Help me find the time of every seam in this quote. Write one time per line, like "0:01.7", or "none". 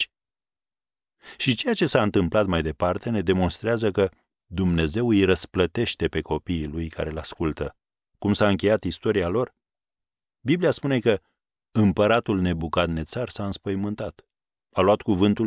0:08.0